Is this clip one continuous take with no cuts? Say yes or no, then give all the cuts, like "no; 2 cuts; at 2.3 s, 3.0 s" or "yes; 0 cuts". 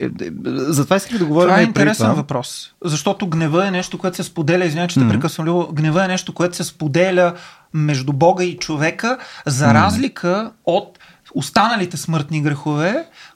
yes; 0 cuts